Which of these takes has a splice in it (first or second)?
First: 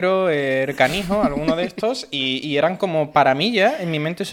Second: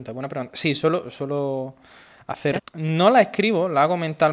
second